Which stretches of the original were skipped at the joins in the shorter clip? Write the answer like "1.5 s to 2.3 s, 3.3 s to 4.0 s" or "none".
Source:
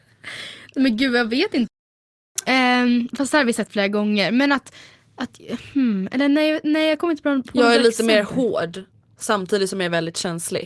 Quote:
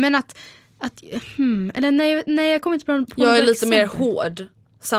none